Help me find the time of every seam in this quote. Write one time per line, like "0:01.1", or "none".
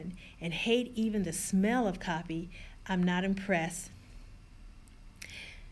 none